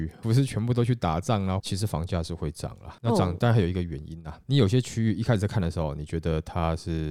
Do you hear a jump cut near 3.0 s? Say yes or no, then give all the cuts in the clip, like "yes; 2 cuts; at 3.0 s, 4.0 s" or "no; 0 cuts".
no; 1 cut; at 1.6 s